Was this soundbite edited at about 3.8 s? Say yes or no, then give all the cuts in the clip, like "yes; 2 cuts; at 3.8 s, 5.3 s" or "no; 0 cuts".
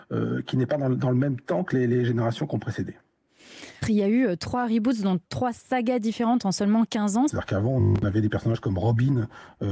yes; 2 cuts; at 3.8 s, 7.3 s